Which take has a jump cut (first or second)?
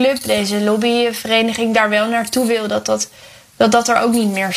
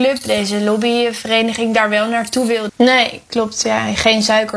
second